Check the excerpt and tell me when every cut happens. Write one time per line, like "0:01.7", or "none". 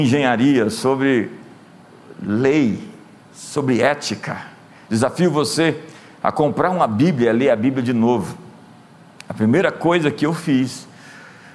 0:04.8